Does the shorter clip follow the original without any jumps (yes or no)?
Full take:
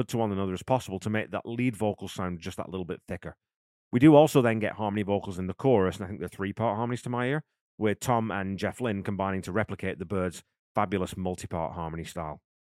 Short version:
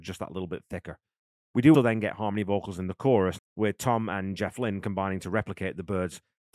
no